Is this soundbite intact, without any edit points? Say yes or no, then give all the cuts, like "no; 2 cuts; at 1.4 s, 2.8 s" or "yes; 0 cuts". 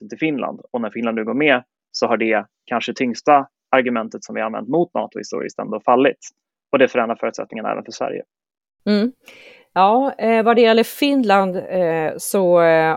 yes; 0 cuts